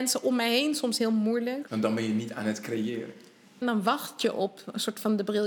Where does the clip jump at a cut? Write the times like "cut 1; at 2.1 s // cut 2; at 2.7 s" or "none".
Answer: cut 1; at 1.7 s // cut 2; at 3.6 s